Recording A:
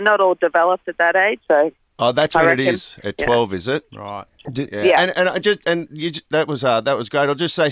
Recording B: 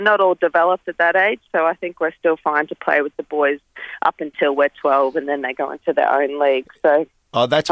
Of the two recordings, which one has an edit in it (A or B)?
A